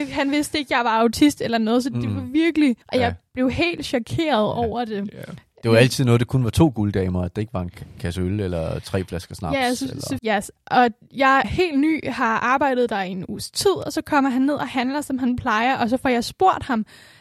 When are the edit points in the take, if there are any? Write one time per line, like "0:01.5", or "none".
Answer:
0:02.8
0:10.2
0:11.4